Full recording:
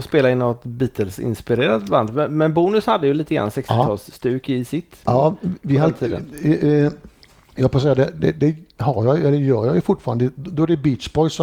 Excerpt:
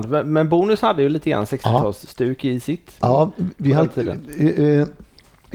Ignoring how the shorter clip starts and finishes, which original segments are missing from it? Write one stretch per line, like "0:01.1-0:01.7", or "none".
none